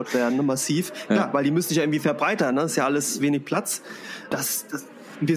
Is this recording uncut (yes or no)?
no